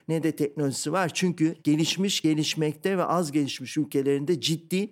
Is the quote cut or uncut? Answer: uncut